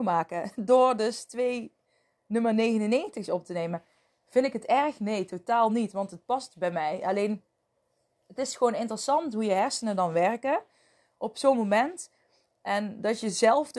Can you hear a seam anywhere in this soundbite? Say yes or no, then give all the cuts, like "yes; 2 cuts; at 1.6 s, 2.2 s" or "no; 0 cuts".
no; 0 cuts